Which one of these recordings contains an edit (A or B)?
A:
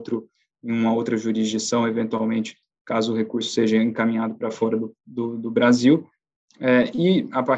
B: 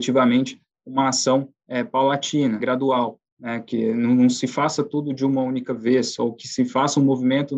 B